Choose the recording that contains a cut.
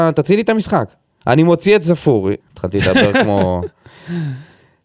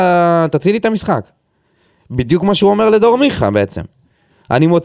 first; 2 cuts; at 1.2 s, 2.4 s

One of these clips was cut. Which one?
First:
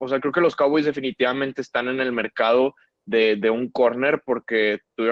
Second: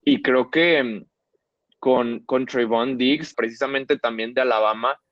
second; 1 cut; at 3.3 s

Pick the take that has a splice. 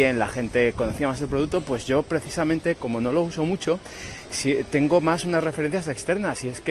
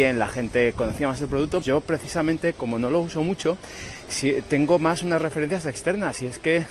second; 1 cut; at 1.6 s

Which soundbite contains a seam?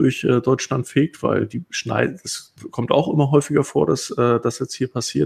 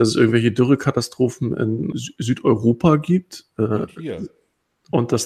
second; 1 cut; at 1.9 s

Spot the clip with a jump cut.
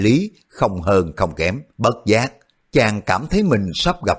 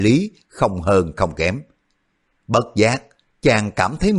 first; 1 cut; at 1.7 s

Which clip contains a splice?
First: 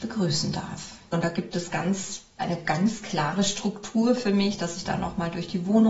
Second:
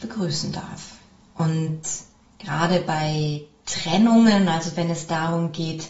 first; 1 cut; at 1.1 s

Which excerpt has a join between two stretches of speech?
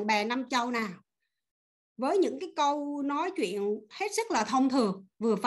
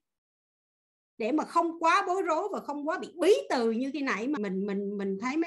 second; 1 cut; at 4.4 s

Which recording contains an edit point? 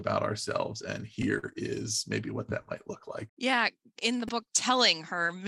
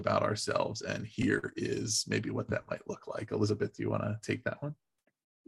first; 2 cuts; at 3.3 s, 4.5 s

